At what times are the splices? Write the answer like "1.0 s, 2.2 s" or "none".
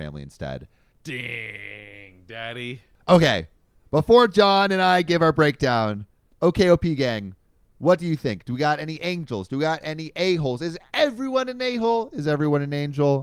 0.9 s